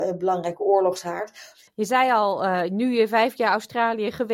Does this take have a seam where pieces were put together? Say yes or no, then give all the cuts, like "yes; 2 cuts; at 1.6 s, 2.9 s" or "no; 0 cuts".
yes; 1 cut; at 1.7 s